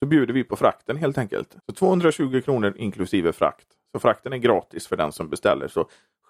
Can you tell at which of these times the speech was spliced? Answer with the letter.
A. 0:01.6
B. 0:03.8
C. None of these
A